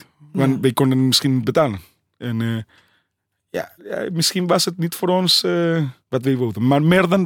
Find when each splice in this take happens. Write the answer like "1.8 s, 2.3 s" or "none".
2.2 s, 3.8 s, 6.0 s